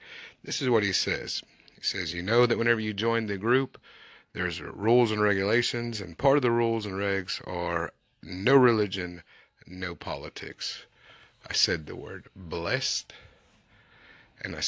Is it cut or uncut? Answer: uncut